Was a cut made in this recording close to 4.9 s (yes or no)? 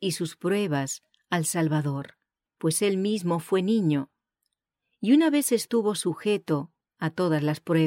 no